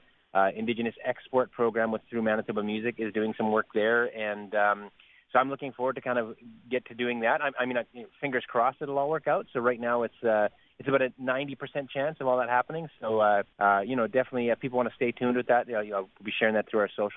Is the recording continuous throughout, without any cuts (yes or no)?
no